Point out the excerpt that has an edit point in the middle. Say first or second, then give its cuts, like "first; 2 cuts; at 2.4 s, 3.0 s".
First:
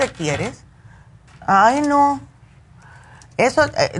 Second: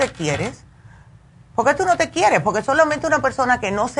first; 1 cut; at 1.3 s